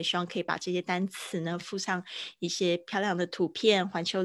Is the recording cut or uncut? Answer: uncut